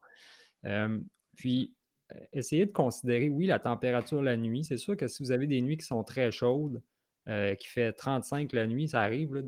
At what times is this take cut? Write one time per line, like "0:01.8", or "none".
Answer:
none